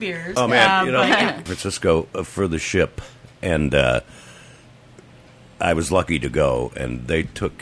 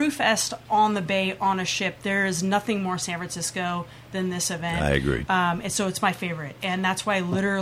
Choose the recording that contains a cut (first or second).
first